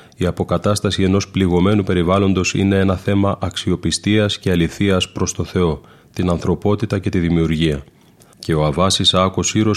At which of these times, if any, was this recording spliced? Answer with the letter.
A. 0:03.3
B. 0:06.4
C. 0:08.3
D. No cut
C